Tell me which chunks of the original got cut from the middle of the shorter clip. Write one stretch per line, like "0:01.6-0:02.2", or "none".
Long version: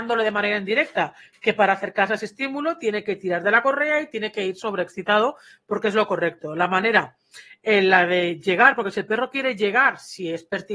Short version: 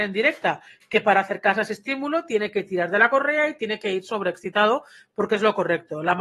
none